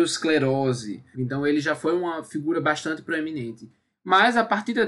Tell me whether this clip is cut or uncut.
cut